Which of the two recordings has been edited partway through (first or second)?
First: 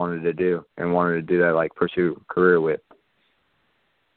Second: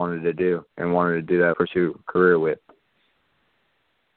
second